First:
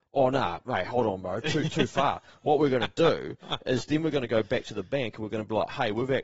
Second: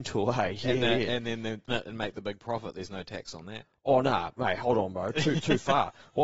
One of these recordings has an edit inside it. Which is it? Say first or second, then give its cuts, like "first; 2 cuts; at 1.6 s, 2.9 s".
second; 1 cut; at 1.7 s